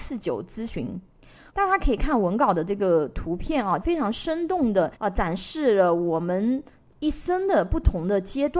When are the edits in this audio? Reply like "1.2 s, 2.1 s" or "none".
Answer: 1.5 s, 3.8 s, 4.9 s